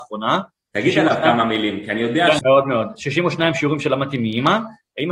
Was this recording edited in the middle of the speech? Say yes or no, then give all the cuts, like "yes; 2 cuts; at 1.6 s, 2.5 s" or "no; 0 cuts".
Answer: yes; 1 cut; at 2.4 s